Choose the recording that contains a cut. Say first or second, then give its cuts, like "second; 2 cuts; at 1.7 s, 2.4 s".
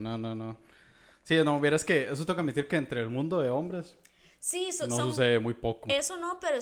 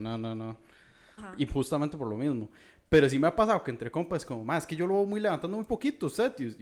second; 1 cut; at 1.2 s